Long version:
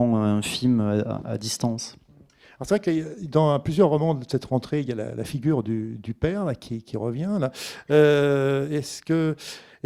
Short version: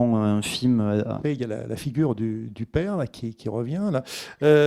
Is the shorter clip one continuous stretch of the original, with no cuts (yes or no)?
no